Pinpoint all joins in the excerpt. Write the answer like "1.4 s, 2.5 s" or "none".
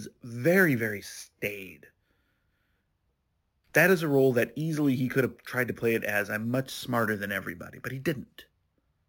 none